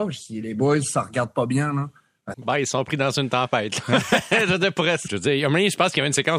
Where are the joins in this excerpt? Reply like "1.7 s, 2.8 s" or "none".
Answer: 2.3 s, 5.1 s